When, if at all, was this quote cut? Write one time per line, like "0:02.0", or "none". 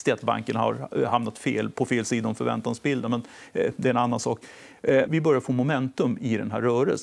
0:05.1